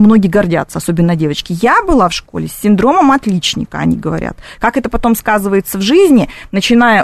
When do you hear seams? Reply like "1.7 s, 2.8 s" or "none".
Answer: none